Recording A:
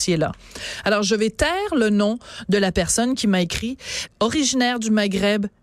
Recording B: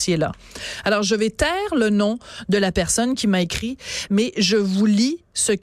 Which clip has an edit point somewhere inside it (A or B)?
A